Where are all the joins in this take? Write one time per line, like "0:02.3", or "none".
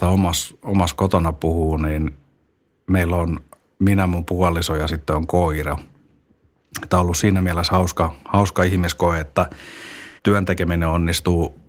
0:10.2